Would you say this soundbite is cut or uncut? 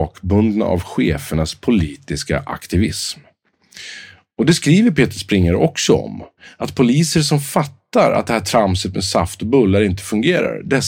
uncut